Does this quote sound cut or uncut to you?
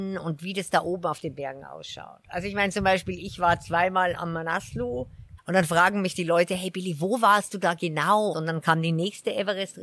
cut